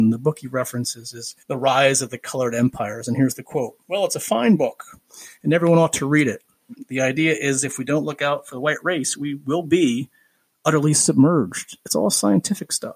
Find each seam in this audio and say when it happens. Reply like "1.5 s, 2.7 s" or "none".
1.4 s